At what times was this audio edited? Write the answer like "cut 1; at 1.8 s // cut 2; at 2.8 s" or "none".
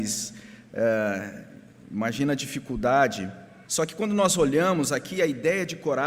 cut 1; at 3.6 s